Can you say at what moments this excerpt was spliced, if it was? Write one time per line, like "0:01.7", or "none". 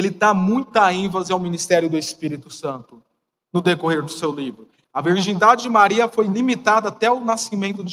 0:04.8

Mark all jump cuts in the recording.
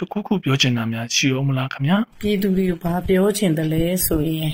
0:02.1

